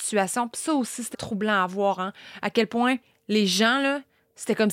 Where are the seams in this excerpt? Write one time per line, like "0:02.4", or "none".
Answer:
0:01.1